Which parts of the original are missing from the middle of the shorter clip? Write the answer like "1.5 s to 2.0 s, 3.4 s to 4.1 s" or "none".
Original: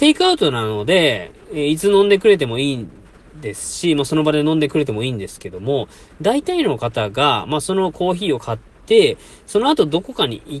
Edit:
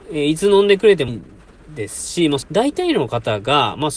2.5 s to 2.7 s, 4.1 s to 6.1 s